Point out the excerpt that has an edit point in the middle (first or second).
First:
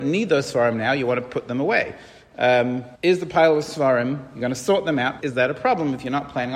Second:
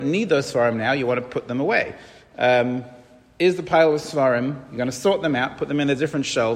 first